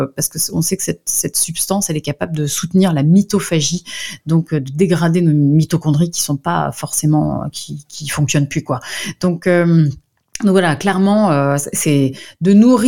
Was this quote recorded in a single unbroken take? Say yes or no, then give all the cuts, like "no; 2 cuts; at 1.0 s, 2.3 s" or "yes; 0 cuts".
yes; 0 cuts